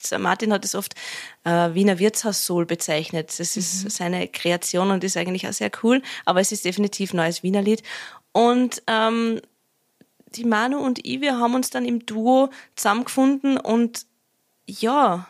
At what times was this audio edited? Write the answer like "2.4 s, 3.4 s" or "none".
none